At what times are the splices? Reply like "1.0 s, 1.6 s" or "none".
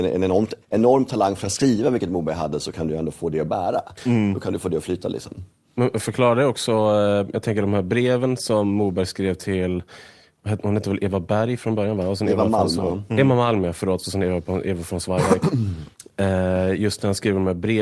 none